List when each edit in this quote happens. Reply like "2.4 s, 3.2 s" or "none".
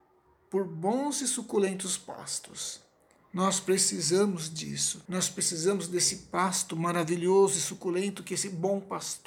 3.2 s, 5.0 s